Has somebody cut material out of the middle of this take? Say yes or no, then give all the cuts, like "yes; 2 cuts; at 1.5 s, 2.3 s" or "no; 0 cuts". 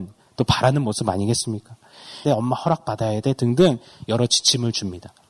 yes; 1 cut; at 2.2 s